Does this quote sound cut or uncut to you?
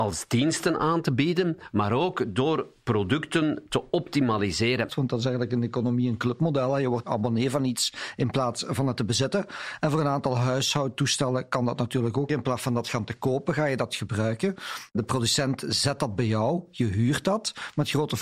cut